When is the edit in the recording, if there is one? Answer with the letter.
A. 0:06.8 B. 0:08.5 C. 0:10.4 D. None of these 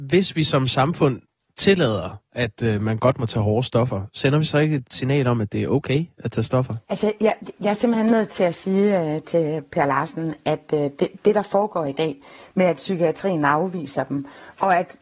A